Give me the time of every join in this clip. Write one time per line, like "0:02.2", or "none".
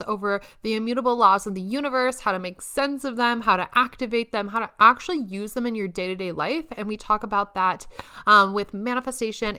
none